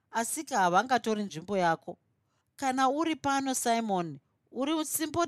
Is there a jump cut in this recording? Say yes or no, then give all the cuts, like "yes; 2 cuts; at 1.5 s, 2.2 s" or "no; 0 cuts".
no; 0 cuts